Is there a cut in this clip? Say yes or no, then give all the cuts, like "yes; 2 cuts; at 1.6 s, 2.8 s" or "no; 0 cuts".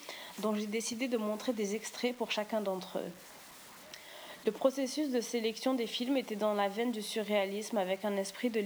no; 0 cuts